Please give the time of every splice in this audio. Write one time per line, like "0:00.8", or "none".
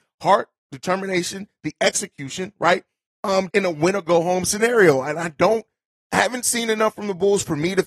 0:03.5